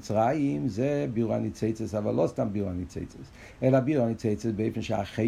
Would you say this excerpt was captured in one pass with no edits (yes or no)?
yes